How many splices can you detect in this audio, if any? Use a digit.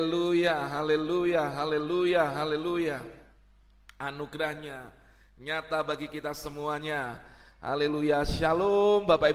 0